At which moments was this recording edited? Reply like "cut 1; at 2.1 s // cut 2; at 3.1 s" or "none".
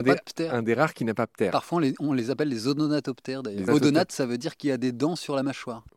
cut 1; at 3.7 s